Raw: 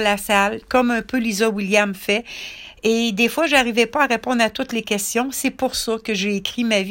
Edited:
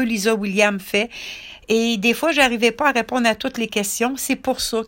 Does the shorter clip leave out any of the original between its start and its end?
no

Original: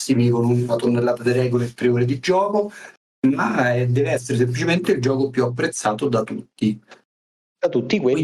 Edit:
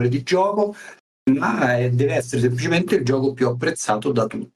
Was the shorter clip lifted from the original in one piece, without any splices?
yes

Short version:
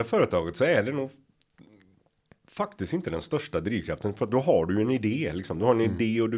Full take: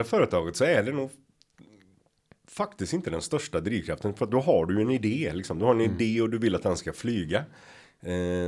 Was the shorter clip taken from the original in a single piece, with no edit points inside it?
yes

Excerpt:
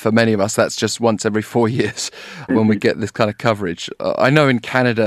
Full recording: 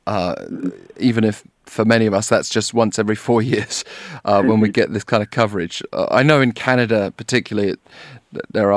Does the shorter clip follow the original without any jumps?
no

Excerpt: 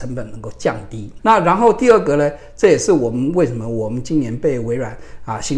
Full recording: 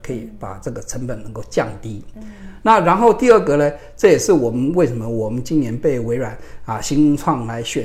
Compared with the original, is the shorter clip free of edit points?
no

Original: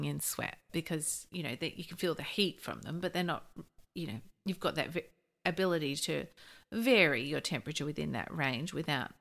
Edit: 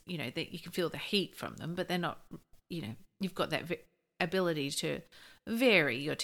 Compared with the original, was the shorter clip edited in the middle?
no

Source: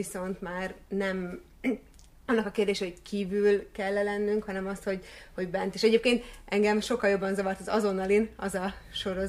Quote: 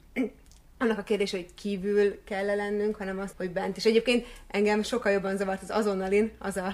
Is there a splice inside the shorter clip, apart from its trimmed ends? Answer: yes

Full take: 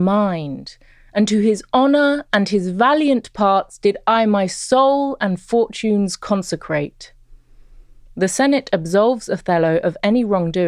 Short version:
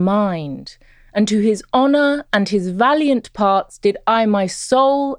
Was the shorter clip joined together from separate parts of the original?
no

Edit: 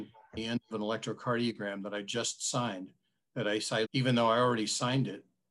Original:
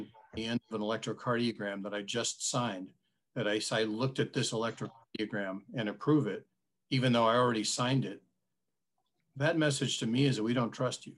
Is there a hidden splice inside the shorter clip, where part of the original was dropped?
yes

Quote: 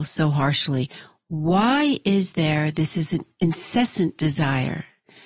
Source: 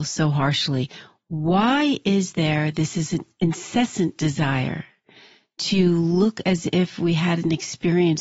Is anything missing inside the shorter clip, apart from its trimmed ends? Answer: no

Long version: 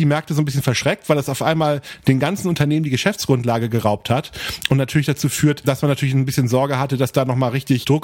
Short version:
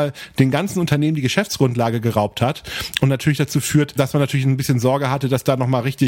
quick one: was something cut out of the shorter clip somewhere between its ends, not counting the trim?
no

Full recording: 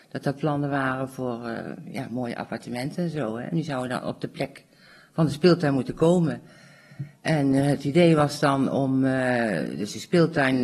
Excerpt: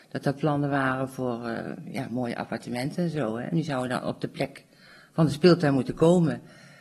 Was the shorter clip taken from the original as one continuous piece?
yes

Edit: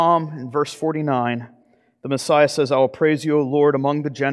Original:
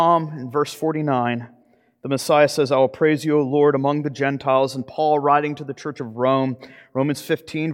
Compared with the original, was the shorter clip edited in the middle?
no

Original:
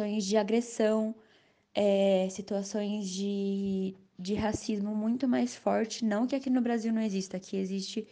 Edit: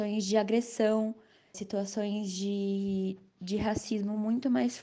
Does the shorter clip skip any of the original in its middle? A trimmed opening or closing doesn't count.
yes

